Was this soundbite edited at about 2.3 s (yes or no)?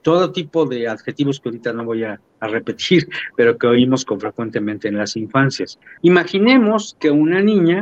no